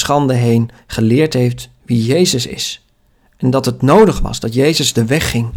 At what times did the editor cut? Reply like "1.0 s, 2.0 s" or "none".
none